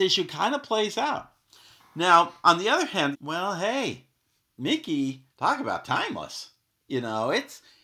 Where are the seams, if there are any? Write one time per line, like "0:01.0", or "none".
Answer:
0:03.1
0:05.3